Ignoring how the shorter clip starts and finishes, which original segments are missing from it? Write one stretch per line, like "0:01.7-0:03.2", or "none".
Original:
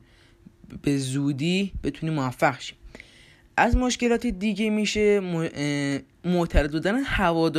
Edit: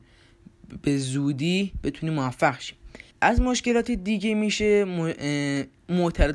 0:03.1-0:03.5